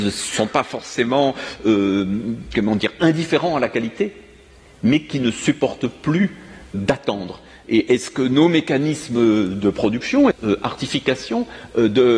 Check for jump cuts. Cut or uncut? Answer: cut